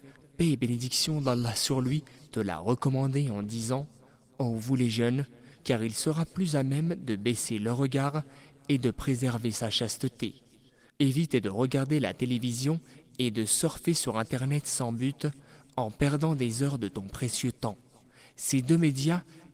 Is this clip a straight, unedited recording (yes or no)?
no